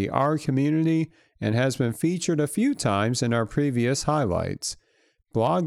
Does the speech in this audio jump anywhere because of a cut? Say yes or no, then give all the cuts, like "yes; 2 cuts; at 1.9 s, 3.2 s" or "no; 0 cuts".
no; 0 cuts